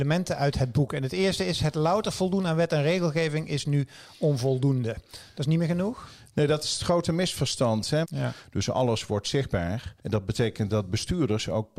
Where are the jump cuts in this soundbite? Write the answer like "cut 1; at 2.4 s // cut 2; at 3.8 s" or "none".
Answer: cut 1; at 8.0 s // cut 2; at 10.0 s